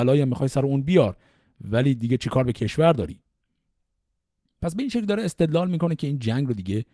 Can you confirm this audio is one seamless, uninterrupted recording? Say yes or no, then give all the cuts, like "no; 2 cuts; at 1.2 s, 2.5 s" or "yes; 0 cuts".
yes; 0 cuts